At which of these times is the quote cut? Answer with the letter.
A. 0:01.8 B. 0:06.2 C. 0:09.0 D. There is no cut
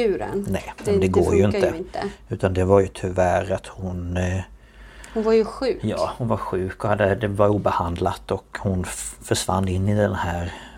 D